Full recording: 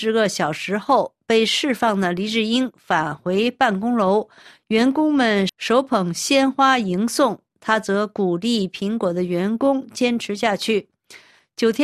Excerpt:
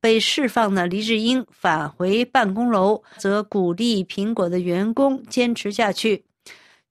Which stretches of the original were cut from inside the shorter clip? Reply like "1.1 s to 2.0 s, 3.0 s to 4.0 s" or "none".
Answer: 4.4 s to 7.8 s